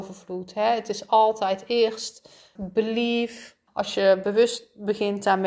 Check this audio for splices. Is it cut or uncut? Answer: cut